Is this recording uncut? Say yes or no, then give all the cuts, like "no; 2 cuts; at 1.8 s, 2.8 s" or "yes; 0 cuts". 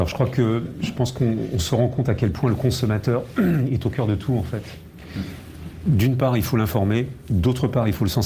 yes; 0 cuts